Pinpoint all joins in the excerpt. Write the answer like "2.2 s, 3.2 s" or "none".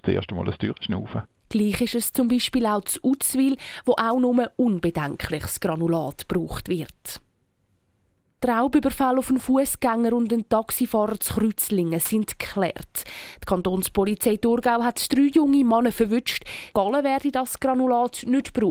16.7 s